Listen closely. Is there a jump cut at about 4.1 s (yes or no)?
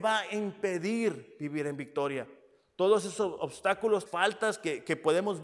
yes